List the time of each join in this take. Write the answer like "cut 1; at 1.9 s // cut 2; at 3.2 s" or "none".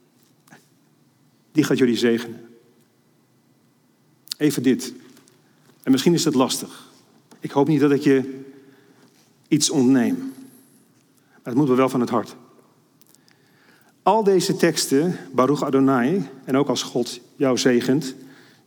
none